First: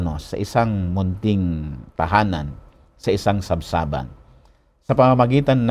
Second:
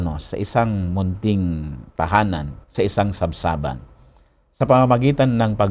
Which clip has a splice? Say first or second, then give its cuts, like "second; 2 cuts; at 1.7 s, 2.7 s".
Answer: second; 1 cut; at 2.6 s